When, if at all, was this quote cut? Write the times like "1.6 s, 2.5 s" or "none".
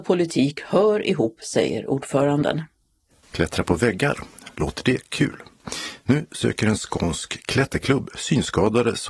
3.2 s